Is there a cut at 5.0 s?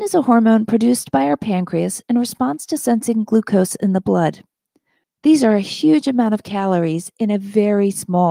yes; 1 cut; at 5.0 s

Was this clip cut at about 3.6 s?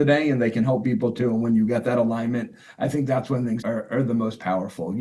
yes; 1 cut; at 3.6 s

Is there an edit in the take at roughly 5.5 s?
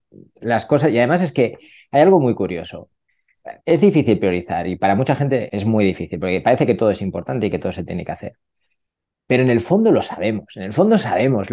yes; 2 cuts; at 3.6 s, 5.5 s

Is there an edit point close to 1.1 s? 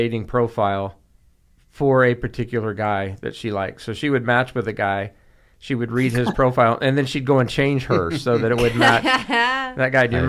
no; 0 cuts

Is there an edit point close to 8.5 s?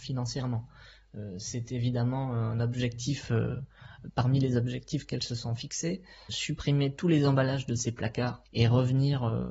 yes; 1 cut; at 8.5 s

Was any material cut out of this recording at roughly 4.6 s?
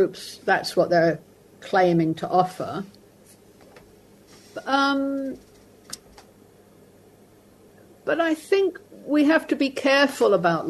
no; 0 cuts

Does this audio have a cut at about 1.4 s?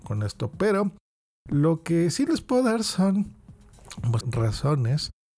no; 1 cut; at 4.2 s

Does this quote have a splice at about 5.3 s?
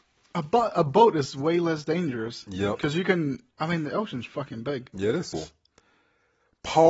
yes; 2 cuts; at 4.3 s, 5.3 s

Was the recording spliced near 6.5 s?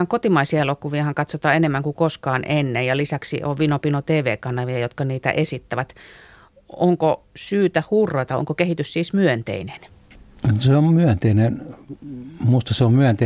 no; 0 cuts

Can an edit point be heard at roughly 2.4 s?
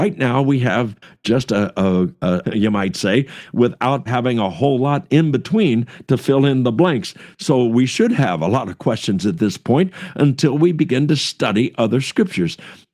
yes; 2 cuts; at 2.4 s, 4.1 s

